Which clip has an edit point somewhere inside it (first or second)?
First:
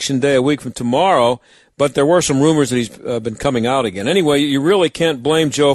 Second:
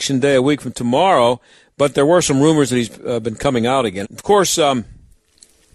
second